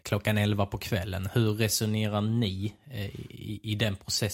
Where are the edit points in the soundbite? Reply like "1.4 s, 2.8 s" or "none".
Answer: none